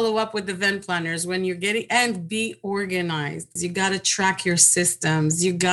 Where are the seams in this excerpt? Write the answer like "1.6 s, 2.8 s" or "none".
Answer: 3.6 s